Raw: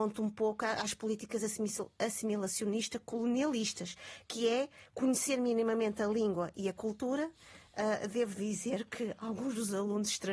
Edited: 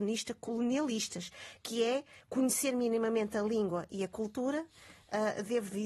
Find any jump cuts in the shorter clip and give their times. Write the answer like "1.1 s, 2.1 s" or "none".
none